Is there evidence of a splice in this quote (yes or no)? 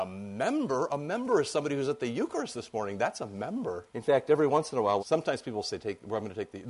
yes